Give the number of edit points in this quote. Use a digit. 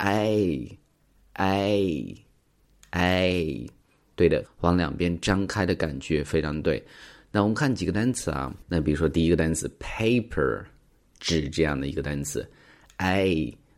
1